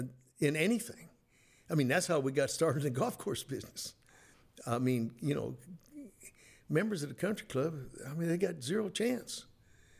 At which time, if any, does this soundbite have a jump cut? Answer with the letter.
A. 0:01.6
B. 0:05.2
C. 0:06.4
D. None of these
D